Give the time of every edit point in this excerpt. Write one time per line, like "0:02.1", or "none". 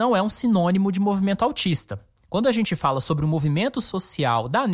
none